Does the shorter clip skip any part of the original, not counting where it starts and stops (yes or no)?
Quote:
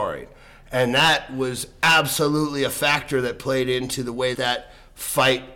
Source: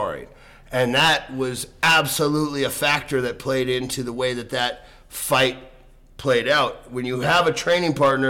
yes